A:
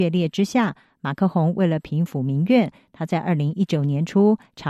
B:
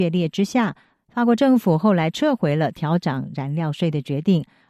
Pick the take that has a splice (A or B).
B